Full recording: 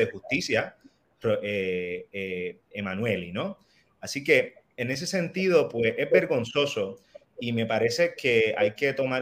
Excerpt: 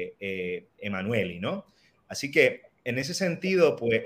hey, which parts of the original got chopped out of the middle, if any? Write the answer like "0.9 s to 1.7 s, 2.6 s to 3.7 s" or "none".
none